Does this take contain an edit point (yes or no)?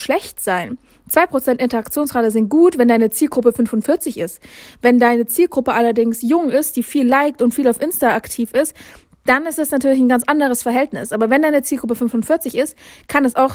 no